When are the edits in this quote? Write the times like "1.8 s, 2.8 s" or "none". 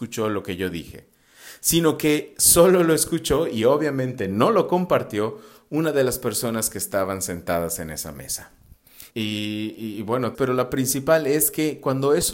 9.1 s, 10.3 s